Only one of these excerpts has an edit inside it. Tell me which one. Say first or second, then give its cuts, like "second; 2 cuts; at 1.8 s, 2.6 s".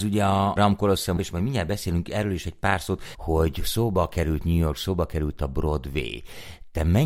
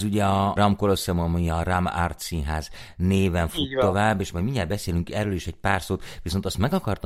first; 2 cuts; at 1.2 s, 3.1 s